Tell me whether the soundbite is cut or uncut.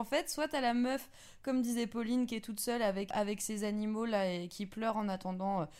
cut